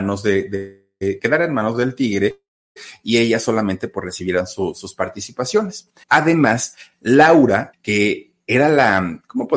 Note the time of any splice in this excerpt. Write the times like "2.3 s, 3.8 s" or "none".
6.0 s, 7.7 s